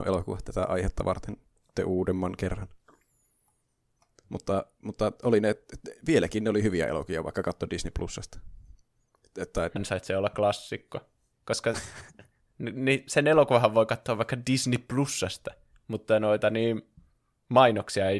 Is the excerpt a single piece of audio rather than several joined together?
no; 2 cuts; at 9.8 s, 11.3 s

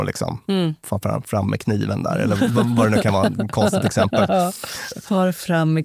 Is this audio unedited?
yes; 0 cuts

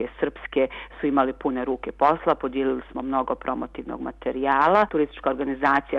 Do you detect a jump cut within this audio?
yes; 1 cut; at 4.9 s

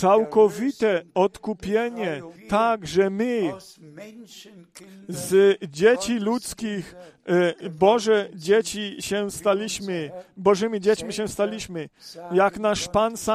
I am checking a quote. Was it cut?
yes; 1 cut; at 2.4 s

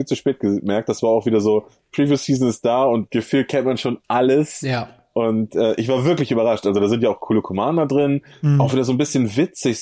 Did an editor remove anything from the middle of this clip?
no; 0 cuts

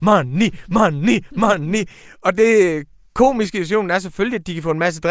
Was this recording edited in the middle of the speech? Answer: no; 0 cuts

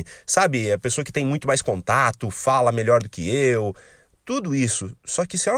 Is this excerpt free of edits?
yes; 0 cuts

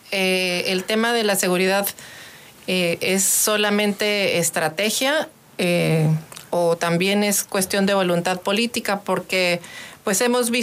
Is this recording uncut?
yes; 0 cuts

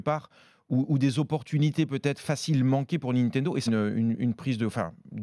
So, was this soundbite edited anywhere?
yes; 1 cut; at 3.7 s

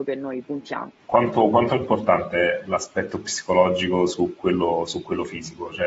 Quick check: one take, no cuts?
no; 1 cut; at 1.0 s

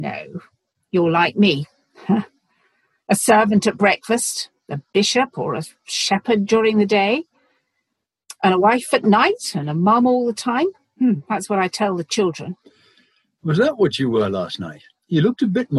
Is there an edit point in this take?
no; 0 cuts

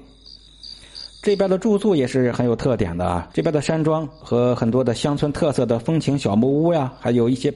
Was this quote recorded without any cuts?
no; 1 cut; at 3.3 s

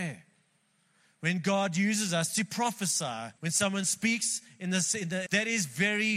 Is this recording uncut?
no; 2 cuts; at 3.4 s, 5.3 s

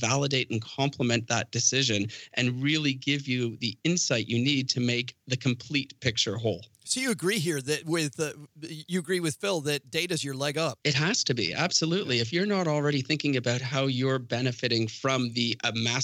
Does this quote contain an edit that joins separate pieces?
no; 0 cuts

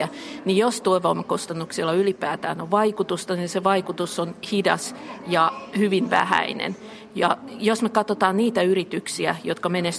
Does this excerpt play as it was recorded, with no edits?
yes; 0 cuts

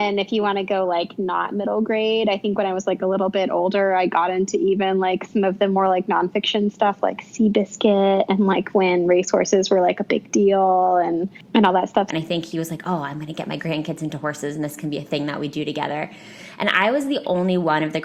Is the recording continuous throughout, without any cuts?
no; 1 cut; at 12.1 s

